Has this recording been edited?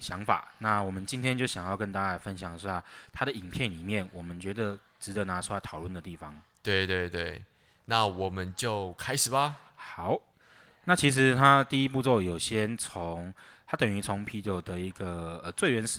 no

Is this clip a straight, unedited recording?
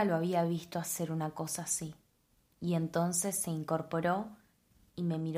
no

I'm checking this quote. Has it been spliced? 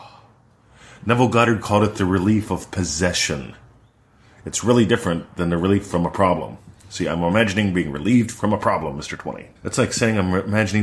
yes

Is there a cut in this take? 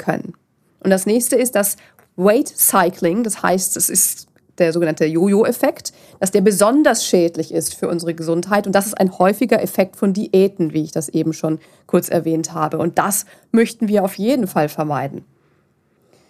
no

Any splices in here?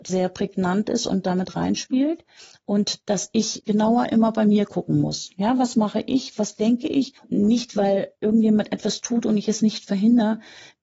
no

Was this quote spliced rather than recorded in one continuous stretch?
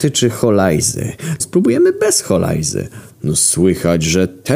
yes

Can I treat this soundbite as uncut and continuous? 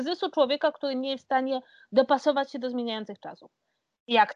yes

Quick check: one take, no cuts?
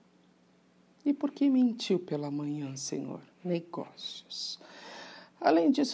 no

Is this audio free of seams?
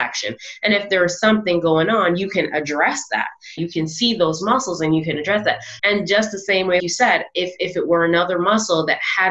no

